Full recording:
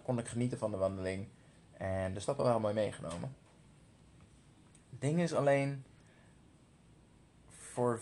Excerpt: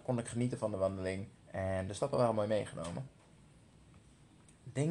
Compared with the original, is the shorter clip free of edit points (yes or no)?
no